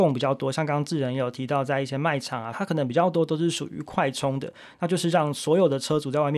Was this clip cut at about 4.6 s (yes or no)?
no